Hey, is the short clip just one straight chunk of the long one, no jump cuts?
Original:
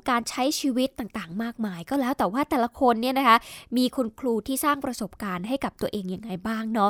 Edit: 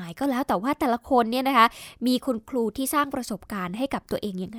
yes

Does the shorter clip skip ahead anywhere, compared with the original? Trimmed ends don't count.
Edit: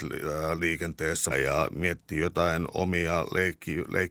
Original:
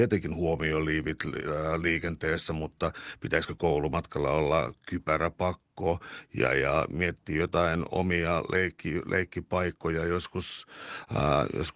yes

